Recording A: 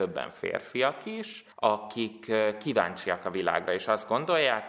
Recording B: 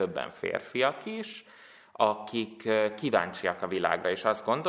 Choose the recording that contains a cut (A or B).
A